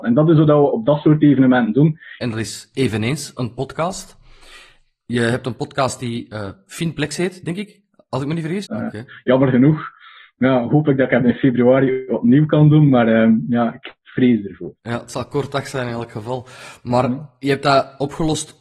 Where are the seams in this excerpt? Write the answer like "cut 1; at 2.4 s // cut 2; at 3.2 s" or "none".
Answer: cut 1; at 2.2 s // cut 2; at 8.6 s